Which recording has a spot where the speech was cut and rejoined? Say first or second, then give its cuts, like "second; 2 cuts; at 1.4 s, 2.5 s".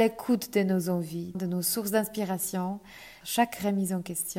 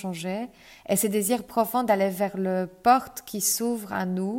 first; 2 cuts; at 1.3 s, 3.2 s